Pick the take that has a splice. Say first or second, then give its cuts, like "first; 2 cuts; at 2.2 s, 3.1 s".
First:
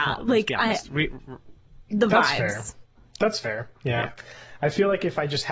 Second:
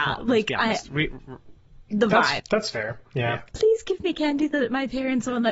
second; 2 cuts; at 2.4 s, 3.5 s